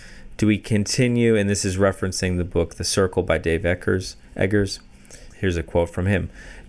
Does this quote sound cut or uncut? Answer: cut